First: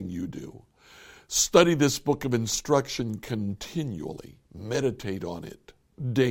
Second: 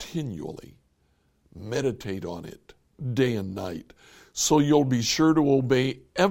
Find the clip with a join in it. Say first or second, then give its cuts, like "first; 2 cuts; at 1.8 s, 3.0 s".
first; 1 cut; at 4.4 s